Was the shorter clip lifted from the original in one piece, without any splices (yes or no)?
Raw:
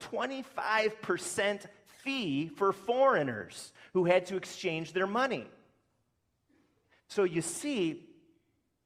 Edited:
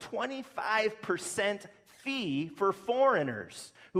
yes